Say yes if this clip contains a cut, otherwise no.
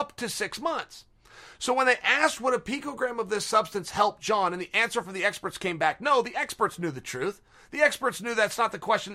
no